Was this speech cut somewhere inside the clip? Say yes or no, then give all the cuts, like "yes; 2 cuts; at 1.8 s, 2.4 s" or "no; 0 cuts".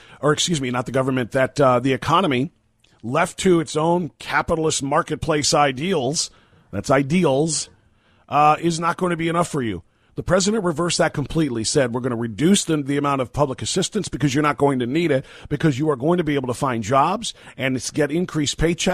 no; 0 cuts